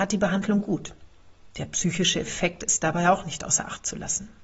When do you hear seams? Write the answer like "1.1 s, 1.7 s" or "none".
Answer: 1.5 s

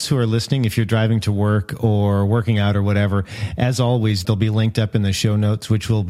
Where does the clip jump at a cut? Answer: 4.2 s

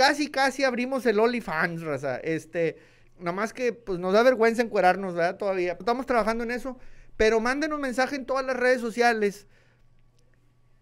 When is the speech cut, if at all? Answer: 3.0 s, 5.8 s

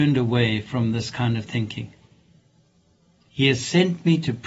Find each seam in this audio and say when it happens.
3.2 s

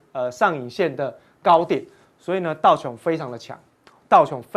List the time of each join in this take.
none

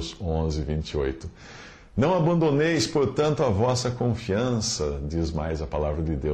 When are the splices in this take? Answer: none

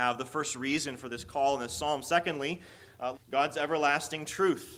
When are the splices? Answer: 3.1 s

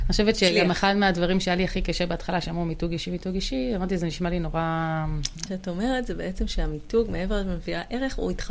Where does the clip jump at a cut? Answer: 5.5 s

